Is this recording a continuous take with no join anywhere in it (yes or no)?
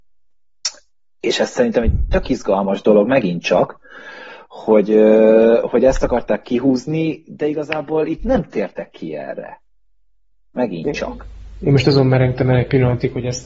yes